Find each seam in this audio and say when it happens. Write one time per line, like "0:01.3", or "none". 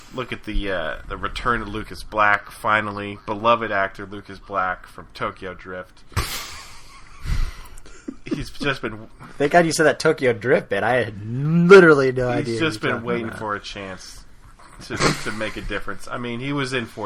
none